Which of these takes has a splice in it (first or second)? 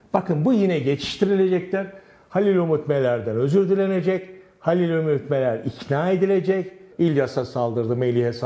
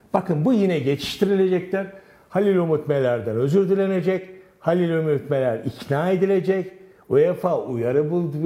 first